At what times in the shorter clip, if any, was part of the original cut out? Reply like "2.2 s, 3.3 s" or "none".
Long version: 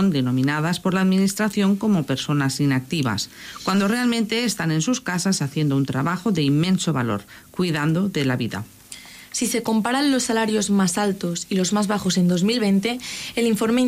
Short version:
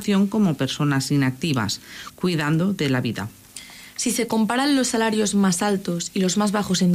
2.1 s